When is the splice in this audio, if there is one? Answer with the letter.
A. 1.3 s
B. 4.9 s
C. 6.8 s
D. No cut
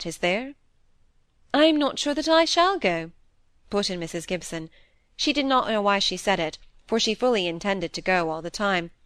D